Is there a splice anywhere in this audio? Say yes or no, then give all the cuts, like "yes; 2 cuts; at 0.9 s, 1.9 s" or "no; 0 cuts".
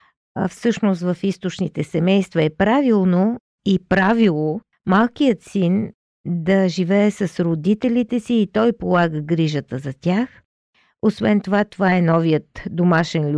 no; 0 cuts